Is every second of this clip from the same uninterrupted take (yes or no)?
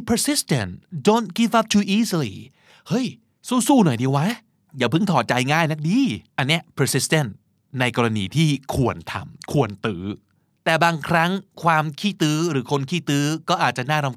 no